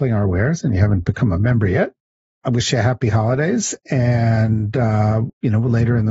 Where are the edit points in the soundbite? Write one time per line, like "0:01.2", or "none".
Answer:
none